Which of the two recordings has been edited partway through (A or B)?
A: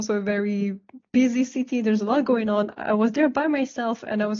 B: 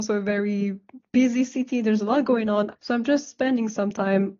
B